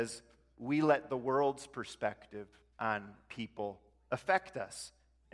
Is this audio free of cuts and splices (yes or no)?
yes